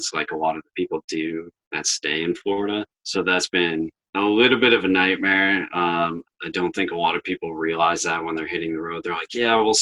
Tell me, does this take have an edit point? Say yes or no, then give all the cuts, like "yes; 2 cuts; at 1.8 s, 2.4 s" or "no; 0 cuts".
yes; 1 cut; at 6.2 s